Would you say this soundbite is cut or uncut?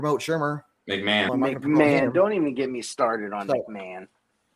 cut